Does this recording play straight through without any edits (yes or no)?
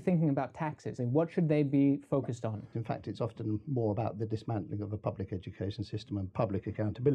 no